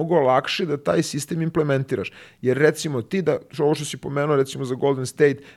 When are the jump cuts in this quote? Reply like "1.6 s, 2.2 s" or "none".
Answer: none